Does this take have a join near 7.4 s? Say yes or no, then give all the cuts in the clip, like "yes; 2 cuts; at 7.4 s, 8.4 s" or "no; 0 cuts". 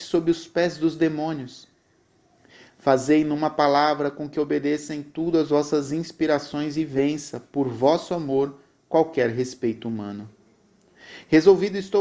no; 0 cuts